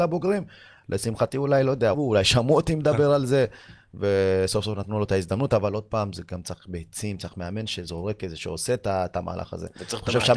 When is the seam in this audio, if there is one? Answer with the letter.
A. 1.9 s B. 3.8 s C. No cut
A